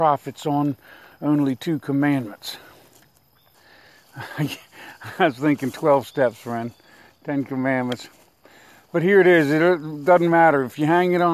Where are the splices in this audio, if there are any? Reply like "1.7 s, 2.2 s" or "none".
3.5 s

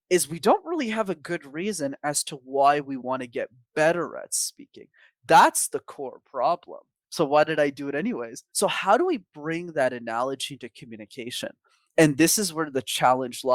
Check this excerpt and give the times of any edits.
7.0 s, 8.5 s

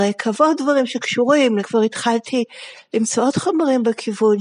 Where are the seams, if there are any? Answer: 1.6 s

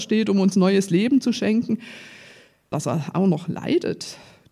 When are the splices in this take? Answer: 2.7 s

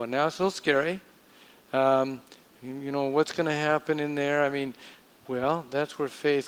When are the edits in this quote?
none

